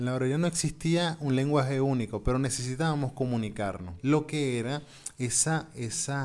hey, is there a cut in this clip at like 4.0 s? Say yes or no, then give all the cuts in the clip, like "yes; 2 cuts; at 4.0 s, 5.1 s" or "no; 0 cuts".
yes; 1 cut; at 4.0 s